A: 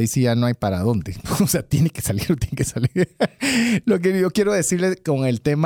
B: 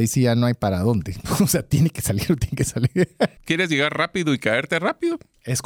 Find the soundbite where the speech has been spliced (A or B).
B